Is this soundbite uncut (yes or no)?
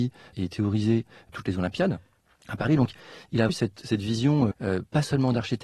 no